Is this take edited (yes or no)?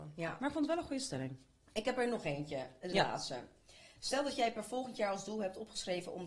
no